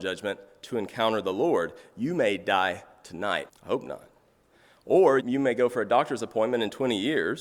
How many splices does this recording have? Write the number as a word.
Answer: two